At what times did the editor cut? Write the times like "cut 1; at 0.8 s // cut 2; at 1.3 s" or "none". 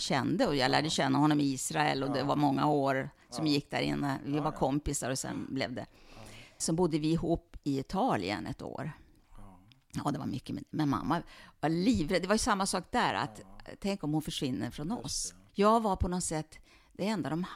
cut 1; at 6.6 s // cut 2; at 15.5 s

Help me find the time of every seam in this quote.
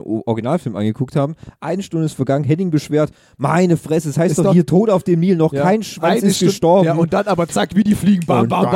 none

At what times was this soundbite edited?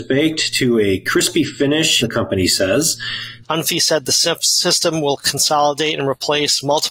cut 1; at 2.0 s // cut 2; at 3.4 s

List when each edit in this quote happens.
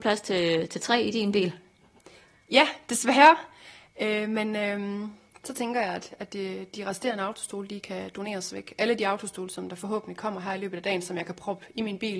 none

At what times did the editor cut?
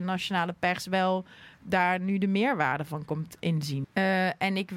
cut 1; at 3.8 s

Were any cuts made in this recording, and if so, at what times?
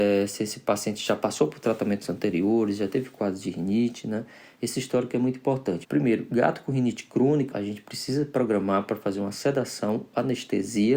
cut 1; at 5.8 s // cut 2; at 7.5 s

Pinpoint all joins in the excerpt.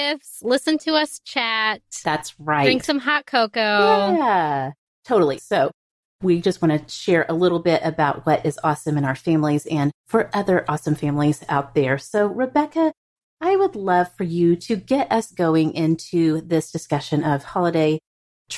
cut 1; at 5.4 s

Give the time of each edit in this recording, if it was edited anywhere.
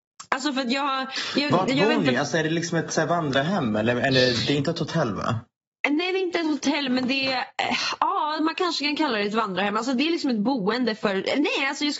none

